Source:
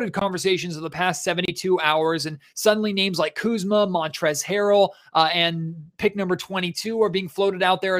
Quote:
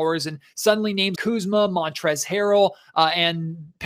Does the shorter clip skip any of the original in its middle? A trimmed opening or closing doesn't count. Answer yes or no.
yes